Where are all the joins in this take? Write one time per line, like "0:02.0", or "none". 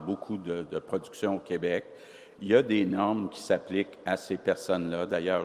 none